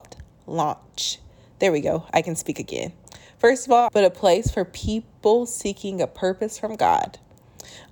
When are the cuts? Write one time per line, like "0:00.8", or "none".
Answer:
0:03.9